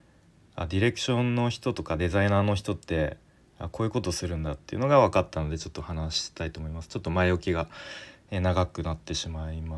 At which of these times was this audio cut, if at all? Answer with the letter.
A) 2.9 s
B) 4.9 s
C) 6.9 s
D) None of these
D